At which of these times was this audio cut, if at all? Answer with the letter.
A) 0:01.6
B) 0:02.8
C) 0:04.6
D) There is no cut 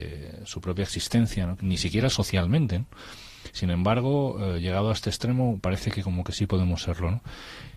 A